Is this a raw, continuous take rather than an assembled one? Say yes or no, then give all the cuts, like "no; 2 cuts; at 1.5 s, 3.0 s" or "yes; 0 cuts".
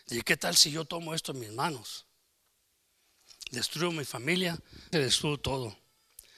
no; 1 cut; at 4.9 s